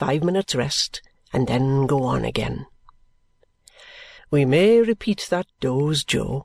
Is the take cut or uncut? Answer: cut